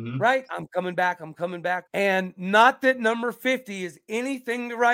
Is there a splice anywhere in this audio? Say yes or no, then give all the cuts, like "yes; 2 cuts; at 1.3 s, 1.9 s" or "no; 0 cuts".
yes; 1 cut; at 1.9 s